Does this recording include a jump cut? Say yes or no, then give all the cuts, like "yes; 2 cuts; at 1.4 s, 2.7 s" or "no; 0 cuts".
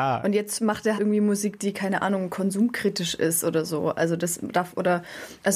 yes; 1 cut; at 1.0 s